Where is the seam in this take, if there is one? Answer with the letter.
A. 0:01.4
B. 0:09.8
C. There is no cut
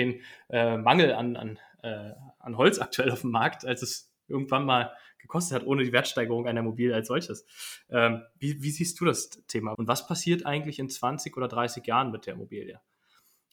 B